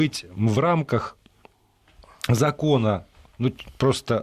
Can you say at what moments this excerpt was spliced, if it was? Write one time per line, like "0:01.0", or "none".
none